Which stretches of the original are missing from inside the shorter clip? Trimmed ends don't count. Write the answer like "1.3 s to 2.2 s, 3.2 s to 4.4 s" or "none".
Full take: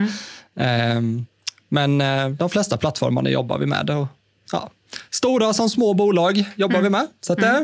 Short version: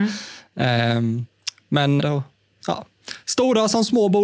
2.0 s to 3.8 s